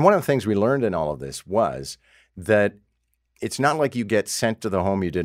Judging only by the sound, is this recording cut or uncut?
uncut